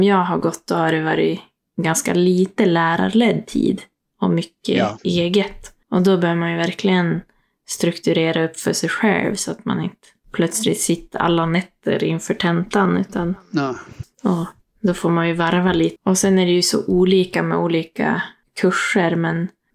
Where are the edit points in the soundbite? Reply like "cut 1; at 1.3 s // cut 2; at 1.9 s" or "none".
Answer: cut 1; at 14.0 s // cut 2; at 16.0 s